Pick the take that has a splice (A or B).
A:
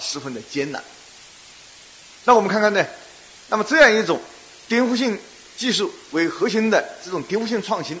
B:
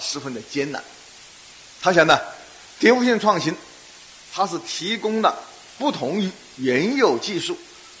B